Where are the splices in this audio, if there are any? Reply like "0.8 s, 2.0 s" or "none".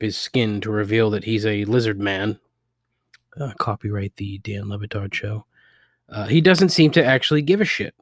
none